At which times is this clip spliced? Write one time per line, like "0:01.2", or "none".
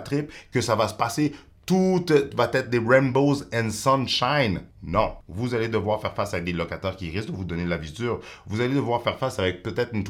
none